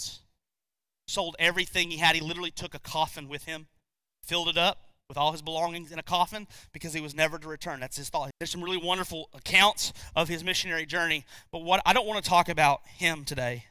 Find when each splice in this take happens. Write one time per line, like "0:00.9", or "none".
0:08.3